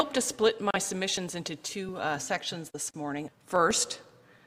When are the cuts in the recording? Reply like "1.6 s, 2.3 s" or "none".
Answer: 3.3 s